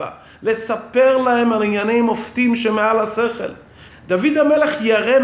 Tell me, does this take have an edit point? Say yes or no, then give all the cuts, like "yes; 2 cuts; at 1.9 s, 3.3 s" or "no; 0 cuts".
yes; 1 cut; at 3.9 s